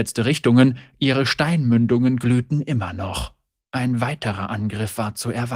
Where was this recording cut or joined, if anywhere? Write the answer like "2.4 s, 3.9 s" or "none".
3.6 s